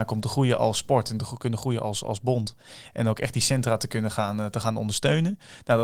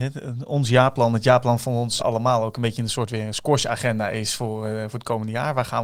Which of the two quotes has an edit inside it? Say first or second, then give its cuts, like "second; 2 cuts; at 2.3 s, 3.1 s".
second; 1 cut; at 2.0 s